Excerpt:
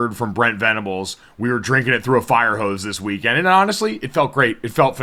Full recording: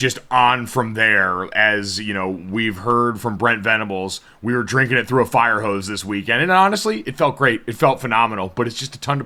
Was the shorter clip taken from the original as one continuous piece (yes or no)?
yes